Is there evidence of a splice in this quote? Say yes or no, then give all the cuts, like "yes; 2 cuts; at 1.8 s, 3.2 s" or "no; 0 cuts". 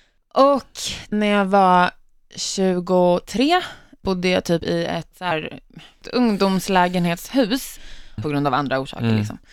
yes; 3 cuts; at 1.1 s, 5.1 s, 8.2 s